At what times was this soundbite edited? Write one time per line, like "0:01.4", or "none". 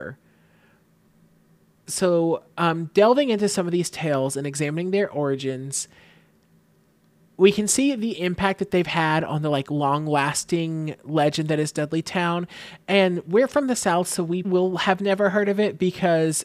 0:14.4